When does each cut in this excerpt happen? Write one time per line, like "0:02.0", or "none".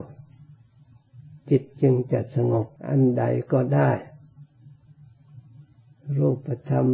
0:02.8